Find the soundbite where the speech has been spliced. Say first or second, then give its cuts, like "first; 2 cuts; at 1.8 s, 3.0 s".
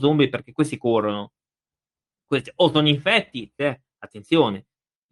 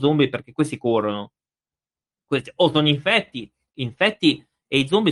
first; 1 cut; at 3.6 s